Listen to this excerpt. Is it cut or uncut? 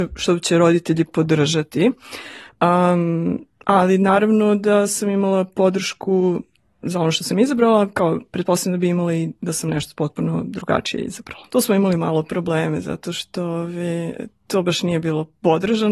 cut